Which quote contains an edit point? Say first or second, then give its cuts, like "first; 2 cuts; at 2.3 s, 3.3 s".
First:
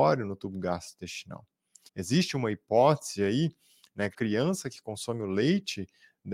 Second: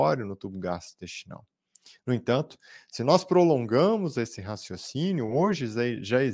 first; 2 cuts; at 1.9 s, 4.1 s